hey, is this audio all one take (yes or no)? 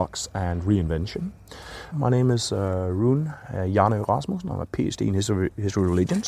no